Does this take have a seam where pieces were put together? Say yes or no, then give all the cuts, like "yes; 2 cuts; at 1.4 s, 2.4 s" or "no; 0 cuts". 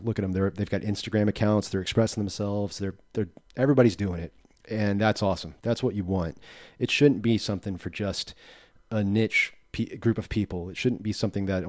no; 0 cuts